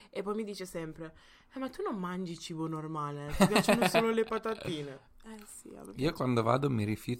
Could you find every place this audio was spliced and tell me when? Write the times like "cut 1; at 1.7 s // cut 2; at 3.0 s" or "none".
none